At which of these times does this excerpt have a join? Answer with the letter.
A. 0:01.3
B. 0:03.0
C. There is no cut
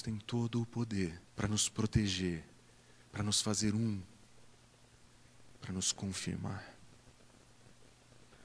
A